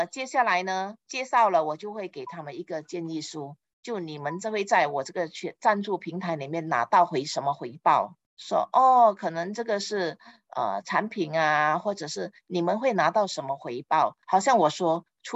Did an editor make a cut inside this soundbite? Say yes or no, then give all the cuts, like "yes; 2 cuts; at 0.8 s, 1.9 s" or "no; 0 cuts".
yes; 3 cuts; at 3.6 s, 8.3 s, 14.2 s